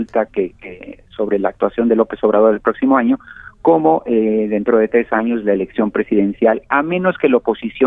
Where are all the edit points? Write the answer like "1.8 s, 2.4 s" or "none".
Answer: none

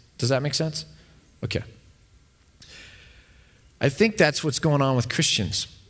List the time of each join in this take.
none

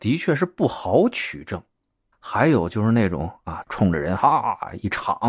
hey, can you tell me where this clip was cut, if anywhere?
2.1 s, 3.6 s

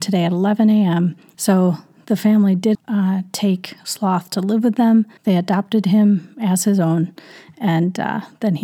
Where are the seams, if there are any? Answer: 1.3 s, 2.7 s, 5.2 s

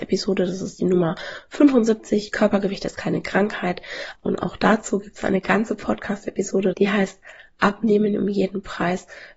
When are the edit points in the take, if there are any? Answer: 4.1 s, 6.7 s

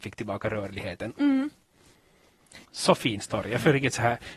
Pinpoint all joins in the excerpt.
1.2 s, 2.6 s

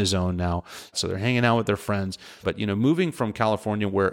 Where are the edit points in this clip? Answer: 0.9 s, 2.4 s

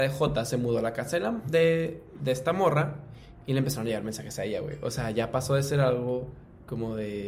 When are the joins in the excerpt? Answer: none

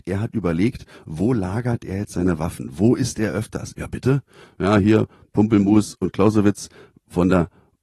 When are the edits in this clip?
3.7 s

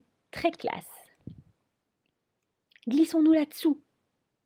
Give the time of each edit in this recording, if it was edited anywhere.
none

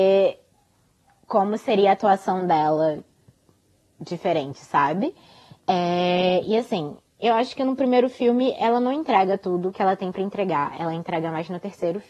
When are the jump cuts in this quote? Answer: none

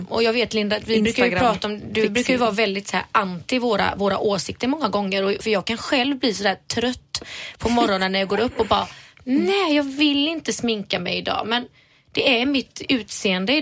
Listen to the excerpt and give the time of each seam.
5.4 s

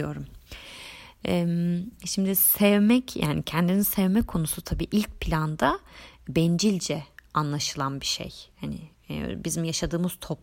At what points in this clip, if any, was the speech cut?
none

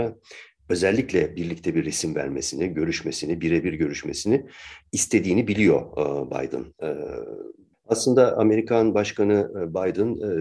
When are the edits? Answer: 7.7 s

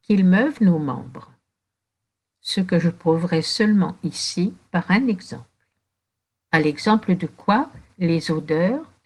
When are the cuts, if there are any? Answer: 6.5 s, 7.9 s

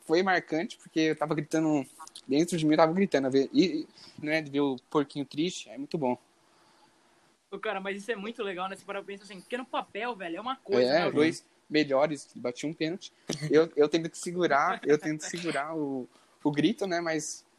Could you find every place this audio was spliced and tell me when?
4.2 s, 11.1 s, 13.3 s

